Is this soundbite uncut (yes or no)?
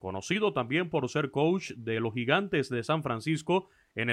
yes